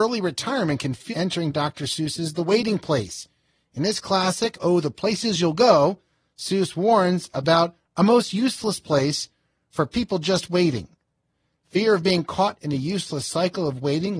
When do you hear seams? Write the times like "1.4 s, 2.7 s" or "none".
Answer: 1.1 s